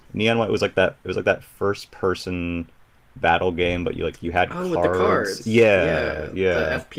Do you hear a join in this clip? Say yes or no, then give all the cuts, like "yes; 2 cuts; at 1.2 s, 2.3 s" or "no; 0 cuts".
no; 0 cuts